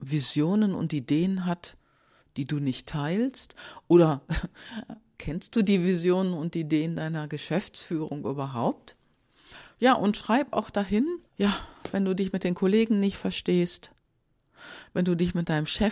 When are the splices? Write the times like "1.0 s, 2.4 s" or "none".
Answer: 9.7 s, 11.3 s